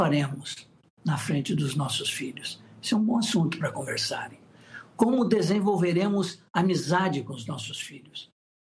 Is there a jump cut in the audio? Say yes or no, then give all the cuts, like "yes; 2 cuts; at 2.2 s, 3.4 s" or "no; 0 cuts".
no; 0 cuts